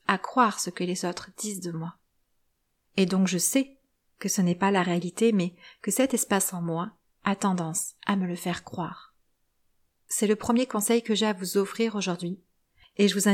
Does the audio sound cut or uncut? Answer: uncut